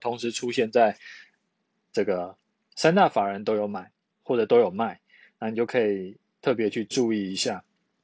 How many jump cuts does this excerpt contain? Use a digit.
1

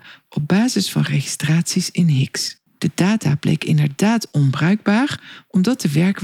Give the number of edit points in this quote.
1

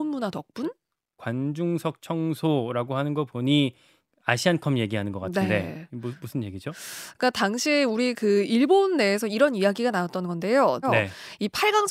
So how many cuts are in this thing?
1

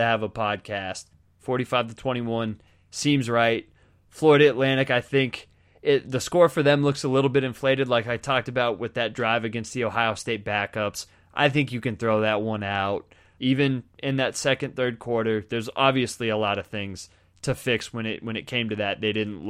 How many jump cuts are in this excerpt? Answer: 2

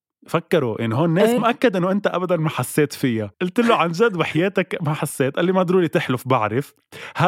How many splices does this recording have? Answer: 2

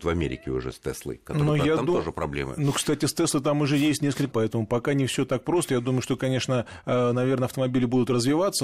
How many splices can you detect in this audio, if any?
1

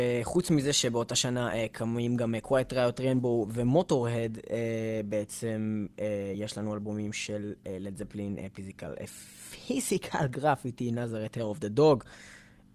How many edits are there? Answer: 0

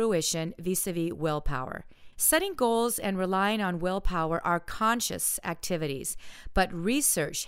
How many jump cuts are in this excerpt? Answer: 1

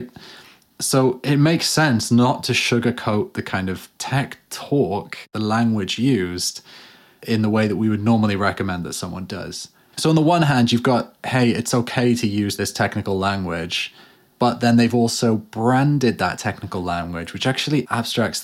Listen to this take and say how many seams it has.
1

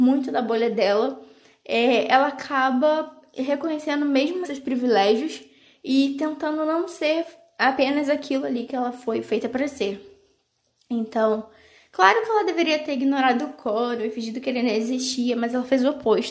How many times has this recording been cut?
1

